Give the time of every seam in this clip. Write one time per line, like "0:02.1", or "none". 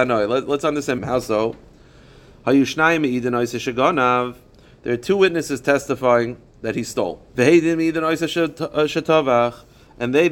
0:01.0
0:07.3